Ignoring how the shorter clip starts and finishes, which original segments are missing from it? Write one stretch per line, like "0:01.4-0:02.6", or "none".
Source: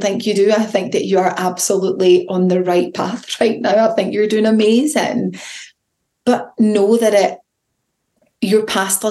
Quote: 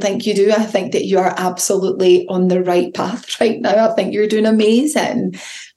none